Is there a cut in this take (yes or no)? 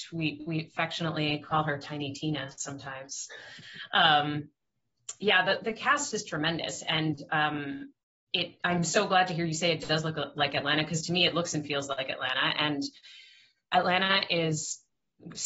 no